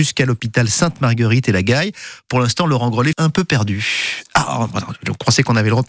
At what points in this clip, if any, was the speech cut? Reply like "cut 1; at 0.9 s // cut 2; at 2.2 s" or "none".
cut 1; at 3.1 s